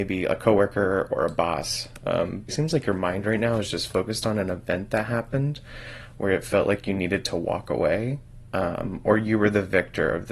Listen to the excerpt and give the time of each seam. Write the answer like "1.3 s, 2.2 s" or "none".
2.5 s